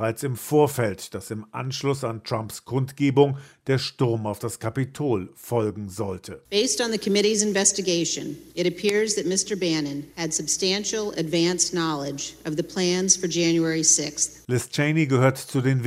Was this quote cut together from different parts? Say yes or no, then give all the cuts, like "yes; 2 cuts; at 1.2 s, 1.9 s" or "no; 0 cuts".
no; 0 cuts